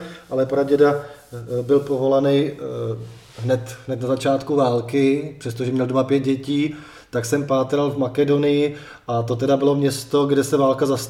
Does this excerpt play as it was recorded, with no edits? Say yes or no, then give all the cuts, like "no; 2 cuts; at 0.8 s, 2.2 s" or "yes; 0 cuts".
yes; 0 cuts